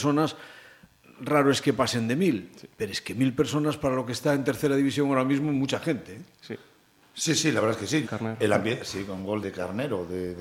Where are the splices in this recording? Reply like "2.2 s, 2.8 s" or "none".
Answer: 8.0 s, 9.4 s